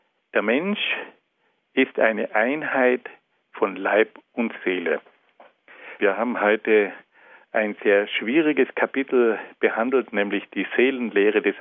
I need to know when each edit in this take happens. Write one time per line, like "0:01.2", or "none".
0:06.0